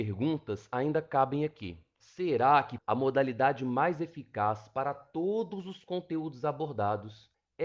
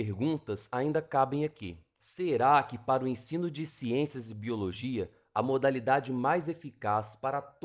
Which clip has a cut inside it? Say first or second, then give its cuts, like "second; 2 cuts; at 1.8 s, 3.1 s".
first; 1 cut; at 2.8 s